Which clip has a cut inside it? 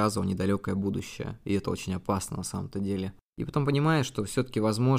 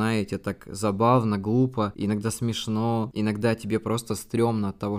first; 1 cut; at 3.3 s

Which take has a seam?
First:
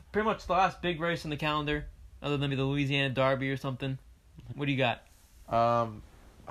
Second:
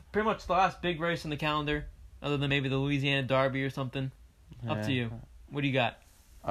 first; 2 cuts; at 2.5 s, 4.5 s

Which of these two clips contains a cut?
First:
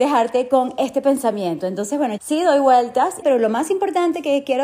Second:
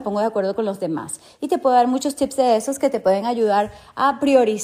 first; 2 cuts; at 2.2 s, 3.2 s

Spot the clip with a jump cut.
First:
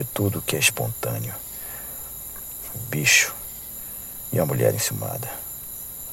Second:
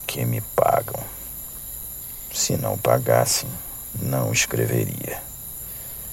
first; 1 cut; at 2.7 s

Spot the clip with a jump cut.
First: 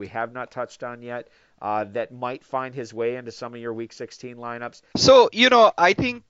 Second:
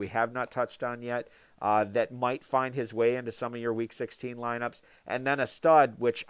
first; 1 cut; at 4.9 s

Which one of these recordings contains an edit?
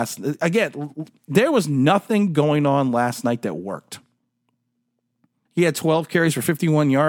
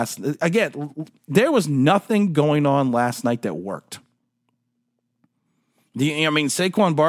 first; 1 cut; at 5.5 s

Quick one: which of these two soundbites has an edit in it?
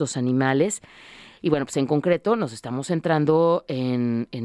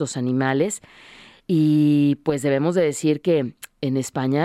first; 1 cut; at 1.4 s

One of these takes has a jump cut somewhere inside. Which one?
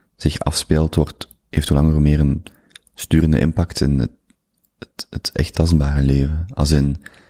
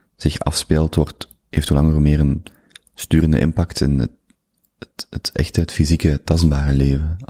first; 1 cut; at 5.5 s

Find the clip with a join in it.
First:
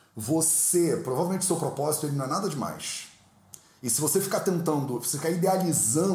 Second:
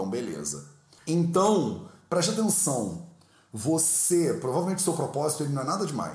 second; 1 cut; at 1.0 s

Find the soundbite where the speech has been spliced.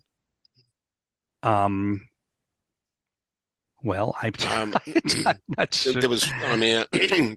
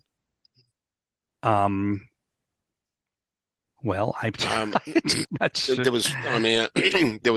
second; 1 cut; at 5.2 s

